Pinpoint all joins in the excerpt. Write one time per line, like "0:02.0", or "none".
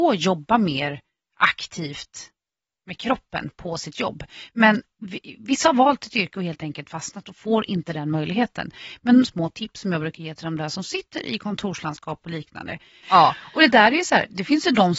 0:09.2
0:13.0